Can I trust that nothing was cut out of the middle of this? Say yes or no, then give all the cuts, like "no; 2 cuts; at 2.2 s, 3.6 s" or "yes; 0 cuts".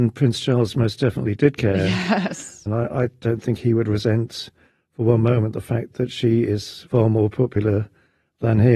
no; 1 cut; at 2.7 s